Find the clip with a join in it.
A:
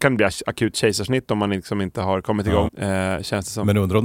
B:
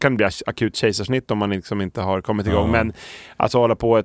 A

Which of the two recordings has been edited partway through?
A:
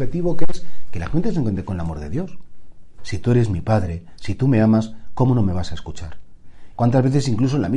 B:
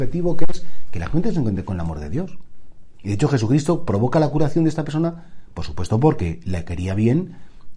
A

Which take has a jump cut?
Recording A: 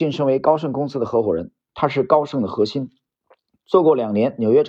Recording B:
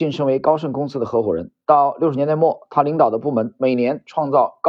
A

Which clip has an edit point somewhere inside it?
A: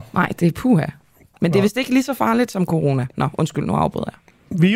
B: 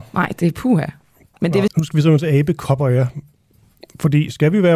B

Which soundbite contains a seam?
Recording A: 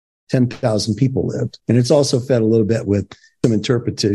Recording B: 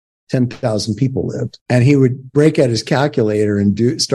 A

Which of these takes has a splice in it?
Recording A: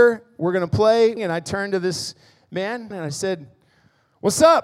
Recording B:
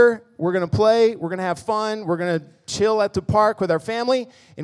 A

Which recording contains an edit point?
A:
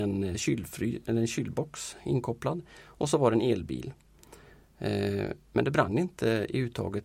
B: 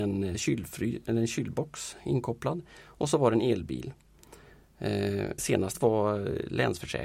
B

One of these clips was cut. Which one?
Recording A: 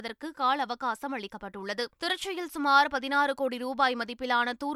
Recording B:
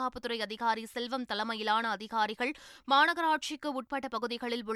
A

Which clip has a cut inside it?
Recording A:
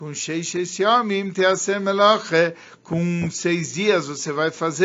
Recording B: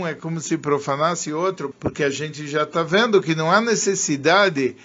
B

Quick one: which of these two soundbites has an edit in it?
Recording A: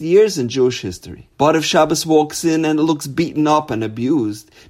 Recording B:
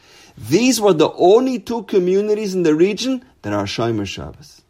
A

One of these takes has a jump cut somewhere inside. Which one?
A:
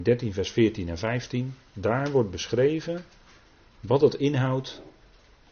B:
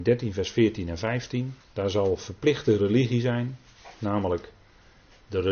B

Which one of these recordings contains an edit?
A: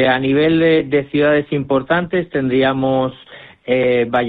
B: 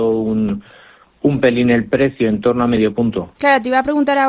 B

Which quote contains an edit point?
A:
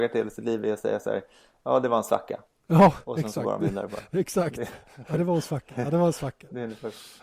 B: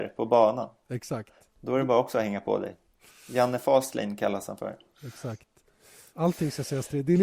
B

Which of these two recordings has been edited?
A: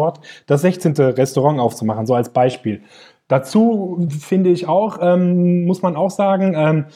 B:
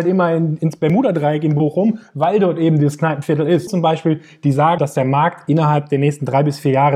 B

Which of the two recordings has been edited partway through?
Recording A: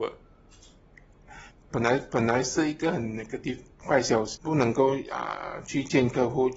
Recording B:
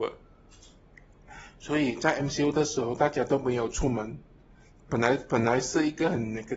A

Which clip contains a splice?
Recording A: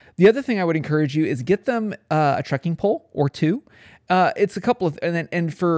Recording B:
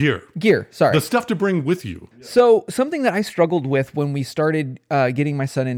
B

